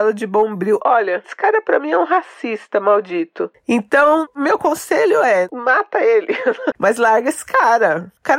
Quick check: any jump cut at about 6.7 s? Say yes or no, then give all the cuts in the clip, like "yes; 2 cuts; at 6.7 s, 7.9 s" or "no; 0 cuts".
yes; 2 cuts; at 1.2 s, 6.7 s